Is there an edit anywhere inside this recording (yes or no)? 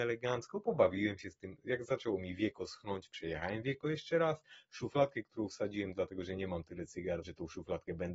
yes